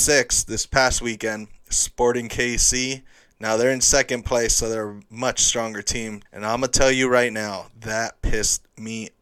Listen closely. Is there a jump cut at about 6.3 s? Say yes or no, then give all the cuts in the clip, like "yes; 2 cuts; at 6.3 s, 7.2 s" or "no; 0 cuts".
yes; 1 cut; at 6.3 s